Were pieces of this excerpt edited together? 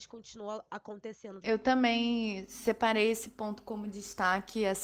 yes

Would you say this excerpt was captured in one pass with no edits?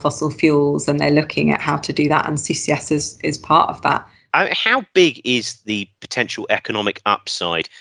yes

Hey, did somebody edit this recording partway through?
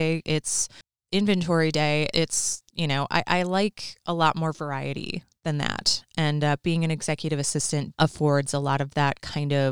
yes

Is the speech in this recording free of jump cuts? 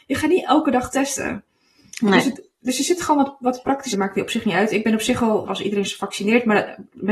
no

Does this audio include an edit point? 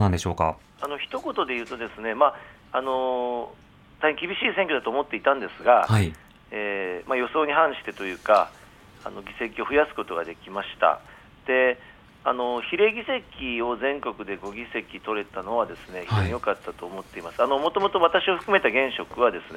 no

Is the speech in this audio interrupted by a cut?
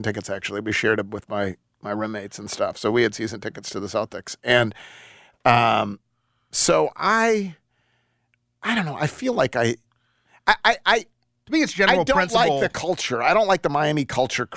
no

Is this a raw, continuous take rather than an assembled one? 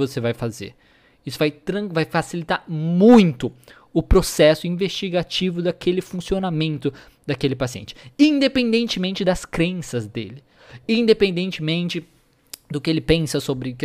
yes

